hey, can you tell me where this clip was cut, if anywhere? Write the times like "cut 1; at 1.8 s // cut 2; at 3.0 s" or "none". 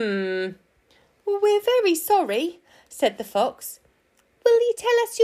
none